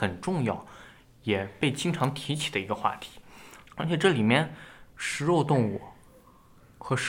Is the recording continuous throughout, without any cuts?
no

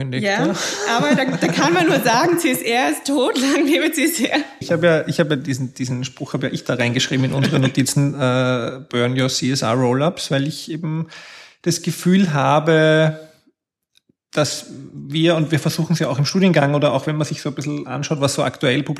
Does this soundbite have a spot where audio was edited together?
yes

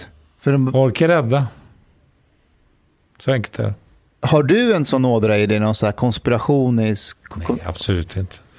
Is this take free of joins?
yes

